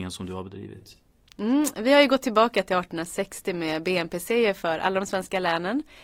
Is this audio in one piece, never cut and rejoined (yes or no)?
yes